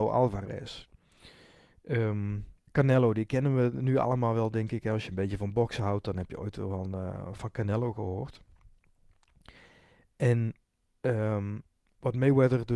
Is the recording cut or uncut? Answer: cut